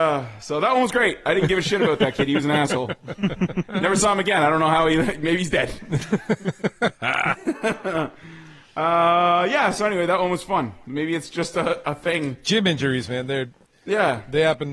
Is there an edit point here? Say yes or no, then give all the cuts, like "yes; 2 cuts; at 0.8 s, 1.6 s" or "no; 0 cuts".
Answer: no; 0 cuts